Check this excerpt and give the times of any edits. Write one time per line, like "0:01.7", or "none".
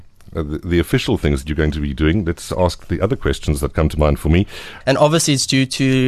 0:04.8